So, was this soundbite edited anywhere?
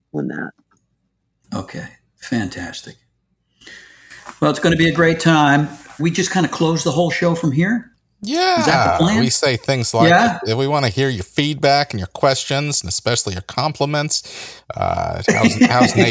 yes; 1 cut; at 6.0 s

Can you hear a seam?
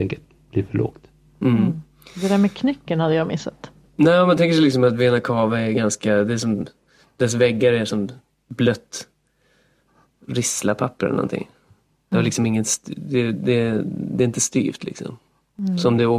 yes; 1 cut; at 3.9 s

